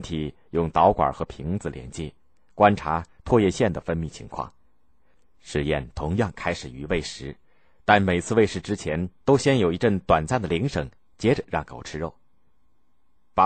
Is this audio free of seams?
yes; 0 cuts

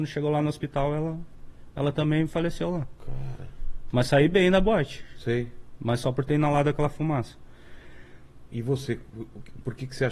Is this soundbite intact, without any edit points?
yes; 0 cuts

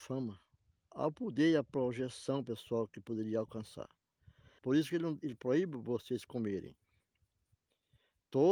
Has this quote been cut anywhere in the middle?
yes; 1 cut; at 4.6 s

